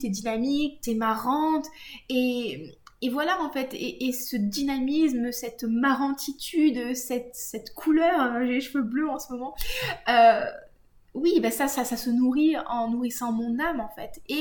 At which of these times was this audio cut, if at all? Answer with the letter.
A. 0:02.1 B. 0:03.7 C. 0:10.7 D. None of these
D